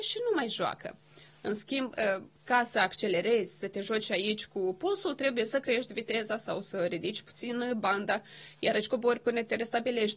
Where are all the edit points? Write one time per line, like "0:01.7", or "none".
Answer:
none